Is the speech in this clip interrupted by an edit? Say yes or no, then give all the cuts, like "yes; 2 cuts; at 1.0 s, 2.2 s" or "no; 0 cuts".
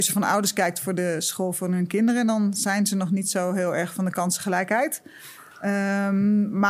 no; 0 cuts